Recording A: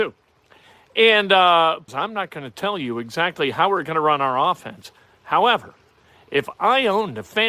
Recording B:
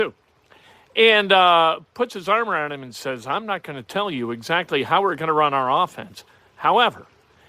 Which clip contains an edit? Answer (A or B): A